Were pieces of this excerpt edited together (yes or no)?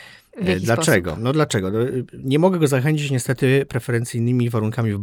no